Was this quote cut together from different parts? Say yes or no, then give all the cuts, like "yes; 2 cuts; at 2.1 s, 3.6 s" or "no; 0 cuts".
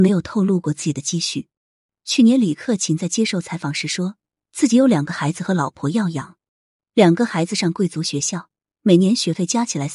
no; 0 cuts